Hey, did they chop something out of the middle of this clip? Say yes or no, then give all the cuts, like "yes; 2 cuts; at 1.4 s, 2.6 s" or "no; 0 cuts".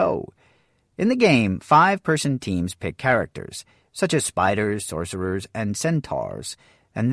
no; 0 cuts